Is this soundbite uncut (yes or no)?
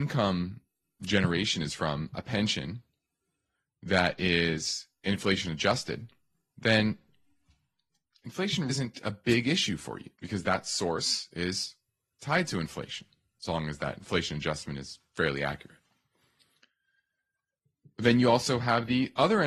no